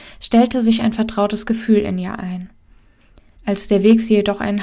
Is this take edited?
yes; 1 cut; at 3.4 s

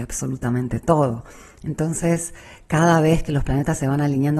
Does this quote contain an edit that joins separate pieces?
no; 0 cuts

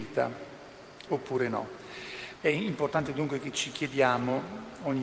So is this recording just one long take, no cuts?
no; 2 cuts; at 1.1 s, 2.4 s

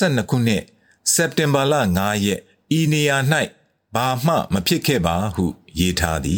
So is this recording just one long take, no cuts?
yes; 0 cuts

